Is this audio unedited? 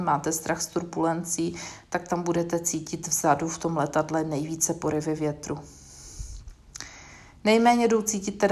yes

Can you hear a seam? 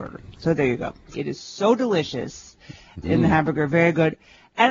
yes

